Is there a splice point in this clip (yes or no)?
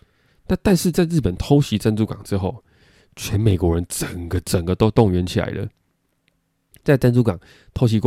no